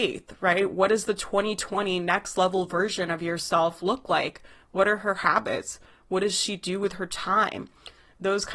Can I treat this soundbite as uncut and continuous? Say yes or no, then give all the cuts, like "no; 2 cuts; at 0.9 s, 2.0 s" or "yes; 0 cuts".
yes; 0 cuts